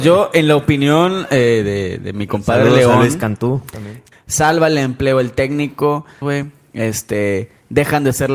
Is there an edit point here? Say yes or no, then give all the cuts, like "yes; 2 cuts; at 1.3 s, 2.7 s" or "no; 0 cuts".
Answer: yes; 2 cuts; at 4.1 s, 6.2 s